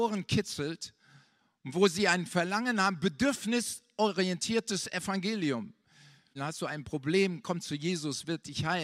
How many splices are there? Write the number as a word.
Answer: one